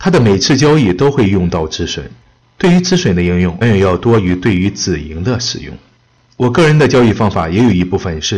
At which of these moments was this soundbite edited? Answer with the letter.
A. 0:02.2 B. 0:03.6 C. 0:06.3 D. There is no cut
B